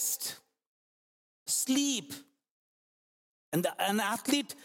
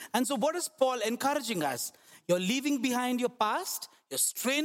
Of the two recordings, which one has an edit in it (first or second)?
first